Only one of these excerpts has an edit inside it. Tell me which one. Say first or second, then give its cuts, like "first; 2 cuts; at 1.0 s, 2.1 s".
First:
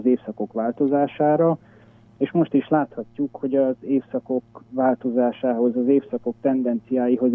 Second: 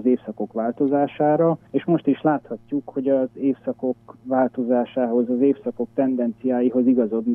second; 1 cut; at 1.7 s